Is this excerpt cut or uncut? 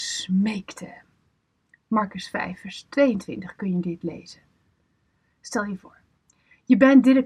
uncut